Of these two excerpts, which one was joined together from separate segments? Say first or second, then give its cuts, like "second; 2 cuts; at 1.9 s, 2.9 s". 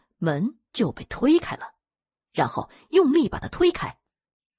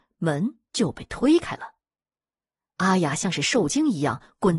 first; 1 cut; at 2.2 s